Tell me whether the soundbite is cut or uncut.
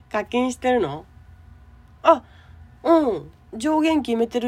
uncut